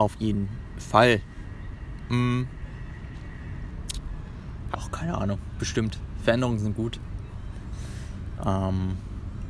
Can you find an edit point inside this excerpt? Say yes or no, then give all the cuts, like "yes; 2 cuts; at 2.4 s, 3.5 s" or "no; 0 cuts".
yes; 1 cut; at 4.7 s